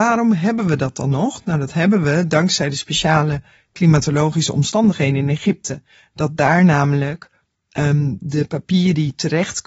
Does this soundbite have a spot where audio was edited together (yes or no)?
no